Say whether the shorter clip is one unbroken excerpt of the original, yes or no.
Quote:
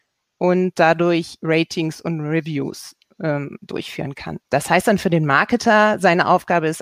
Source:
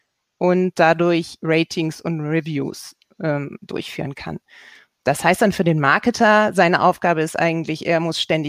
no